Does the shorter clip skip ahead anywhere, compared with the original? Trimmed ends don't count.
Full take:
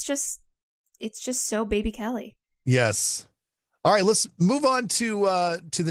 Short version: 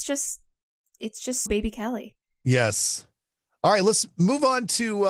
yes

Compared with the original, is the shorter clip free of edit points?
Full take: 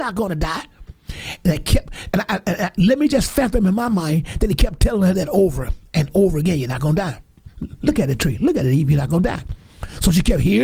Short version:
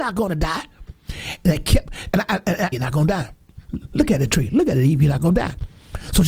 no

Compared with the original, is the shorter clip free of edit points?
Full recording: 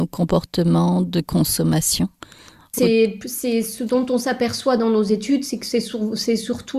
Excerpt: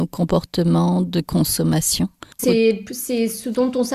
no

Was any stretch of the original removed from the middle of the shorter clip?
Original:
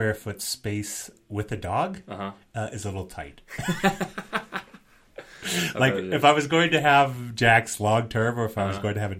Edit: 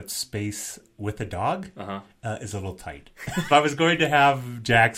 yes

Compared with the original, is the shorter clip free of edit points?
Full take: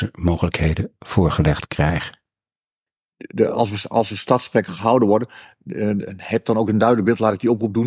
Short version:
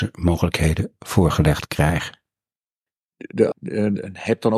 no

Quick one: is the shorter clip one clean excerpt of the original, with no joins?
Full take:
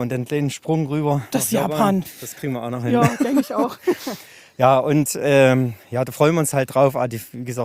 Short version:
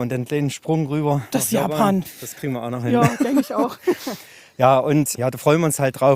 no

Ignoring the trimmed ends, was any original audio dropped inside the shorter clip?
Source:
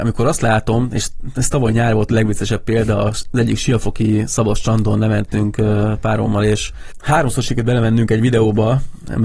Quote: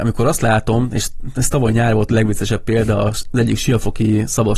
no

